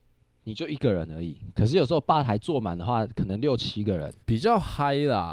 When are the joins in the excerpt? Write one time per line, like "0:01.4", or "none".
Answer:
0:04.2